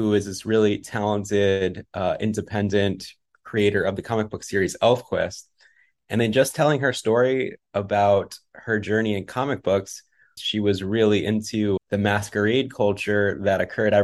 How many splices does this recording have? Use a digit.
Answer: 2